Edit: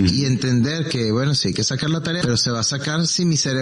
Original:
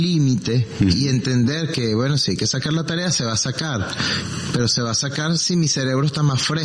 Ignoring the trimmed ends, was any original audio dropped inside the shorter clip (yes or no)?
yes